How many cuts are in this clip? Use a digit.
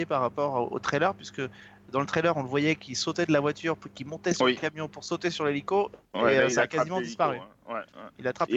0